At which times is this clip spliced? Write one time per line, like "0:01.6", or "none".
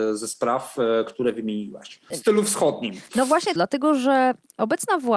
0:02.1
0:03.6